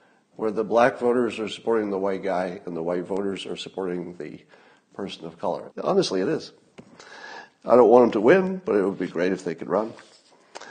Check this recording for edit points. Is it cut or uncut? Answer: cut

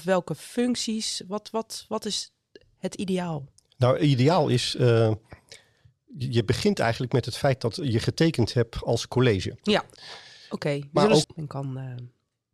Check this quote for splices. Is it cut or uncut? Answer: cut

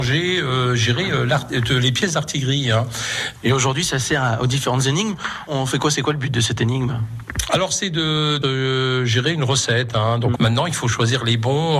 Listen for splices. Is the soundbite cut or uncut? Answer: cut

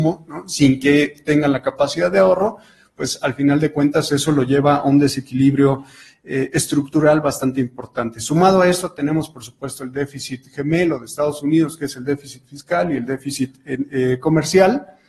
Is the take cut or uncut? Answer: uncut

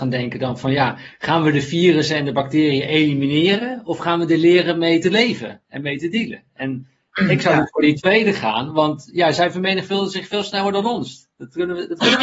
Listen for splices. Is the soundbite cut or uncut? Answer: uncut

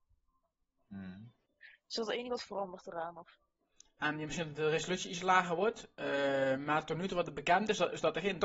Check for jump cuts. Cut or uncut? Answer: uncut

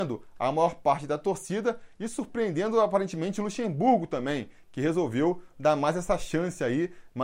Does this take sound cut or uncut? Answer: uncut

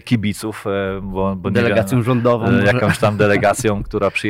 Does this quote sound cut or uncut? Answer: uncut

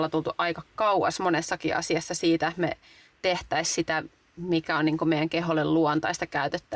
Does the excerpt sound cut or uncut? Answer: uncut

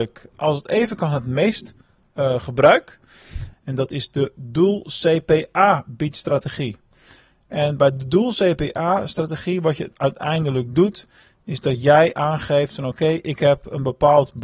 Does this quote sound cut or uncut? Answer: cut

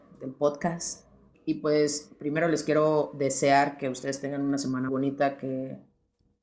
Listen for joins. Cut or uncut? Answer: cut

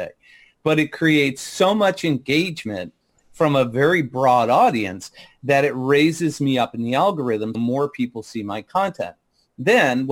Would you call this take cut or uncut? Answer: cut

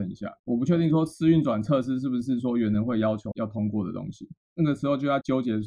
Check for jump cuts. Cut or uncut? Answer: cut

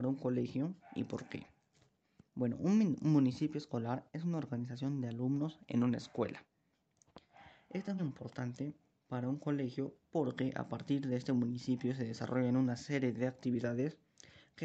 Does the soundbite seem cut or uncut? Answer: cut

